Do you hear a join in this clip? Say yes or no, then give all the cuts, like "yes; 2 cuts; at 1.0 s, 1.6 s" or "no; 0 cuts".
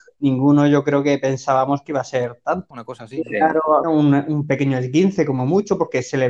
yes; 2 cuts; at 2.7 s, 3.8 s